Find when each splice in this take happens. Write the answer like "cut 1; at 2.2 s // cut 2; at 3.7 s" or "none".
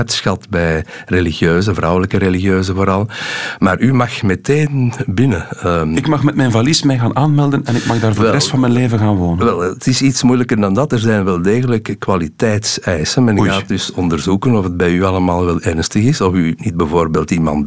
none